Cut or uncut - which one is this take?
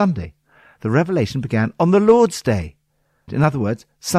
cut